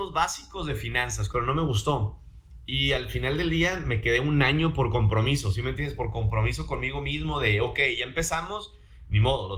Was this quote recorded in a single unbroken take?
no; 1 cut; at 1.3 s

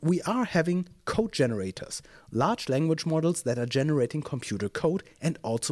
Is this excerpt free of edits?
yes; 0 cuts

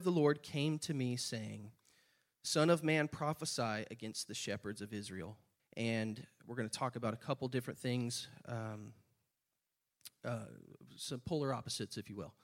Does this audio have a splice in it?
yes; 1 cut; at 5.6 s

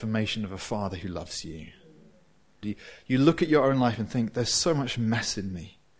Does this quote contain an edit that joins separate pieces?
yes; 1 cut; at 2.6 s

